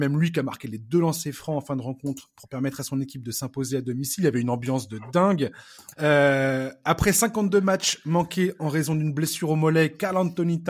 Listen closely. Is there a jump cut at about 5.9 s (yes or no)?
yes